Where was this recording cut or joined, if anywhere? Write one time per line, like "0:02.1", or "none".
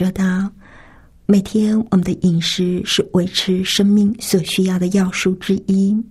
none